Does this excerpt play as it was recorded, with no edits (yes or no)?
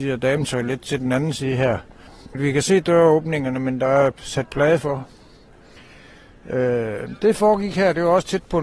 yes